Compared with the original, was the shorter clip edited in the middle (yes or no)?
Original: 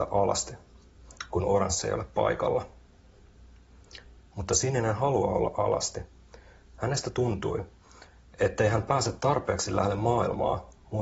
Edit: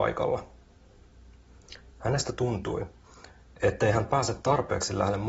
yes